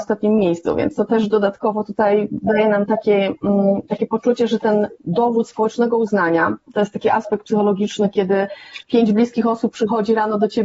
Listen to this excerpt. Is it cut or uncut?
uncut